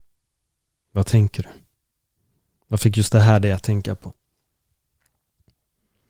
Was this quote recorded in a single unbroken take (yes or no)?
yes